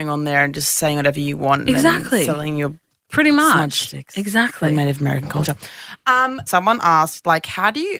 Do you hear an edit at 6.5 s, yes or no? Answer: yes